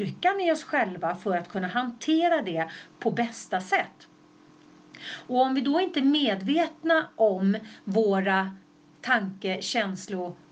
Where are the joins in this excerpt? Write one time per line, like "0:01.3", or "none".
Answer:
none